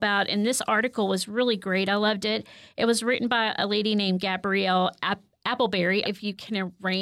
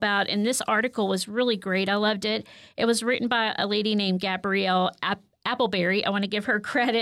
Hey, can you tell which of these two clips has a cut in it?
first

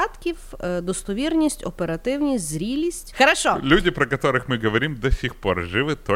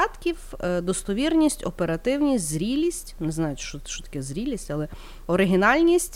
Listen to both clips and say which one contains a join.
first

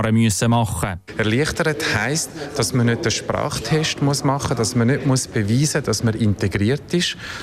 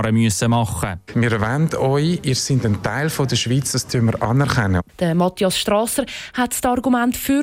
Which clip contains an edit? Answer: second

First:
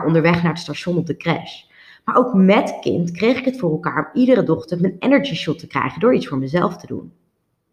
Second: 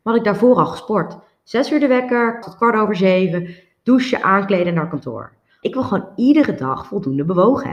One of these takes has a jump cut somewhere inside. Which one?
second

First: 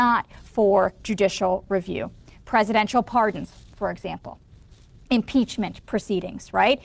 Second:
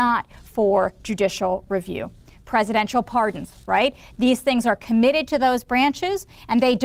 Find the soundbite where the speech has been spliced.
second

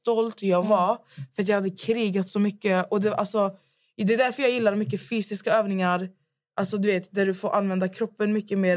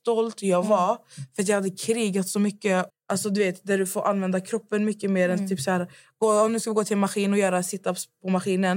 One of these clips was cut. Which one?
second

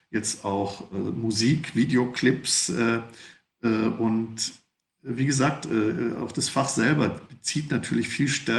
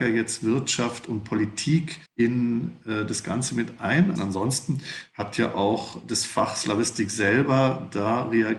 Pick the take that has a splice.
second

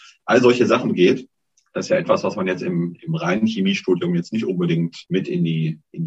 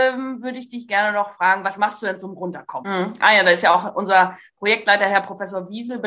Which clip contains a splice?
second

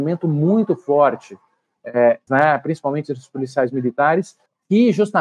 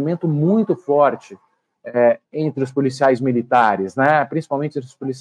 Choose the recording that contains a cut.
first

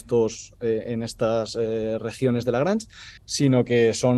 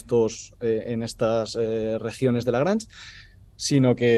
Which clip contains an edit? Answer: first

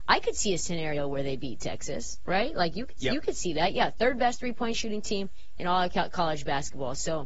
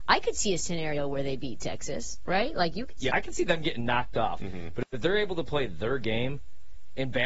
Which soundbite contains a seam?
second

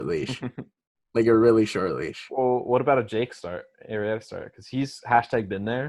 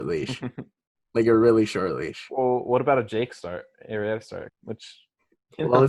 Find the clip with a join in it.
second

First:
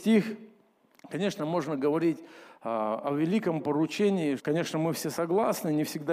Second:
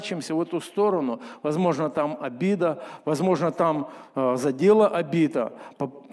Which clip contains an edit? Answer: first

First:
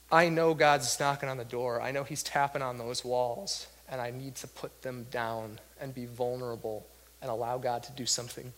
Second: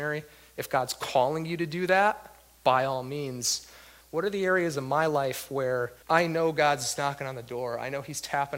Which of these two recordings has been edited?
second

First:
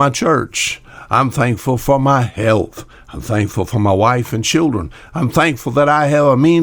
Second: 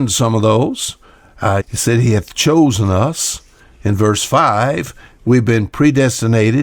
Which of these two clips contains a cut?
second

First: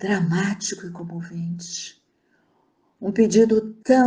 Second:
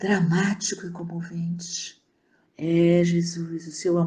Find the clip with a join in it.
second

